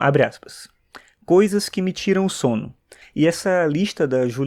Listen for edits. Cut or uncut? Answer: cut